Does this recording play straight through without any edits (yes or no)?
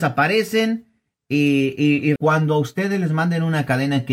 no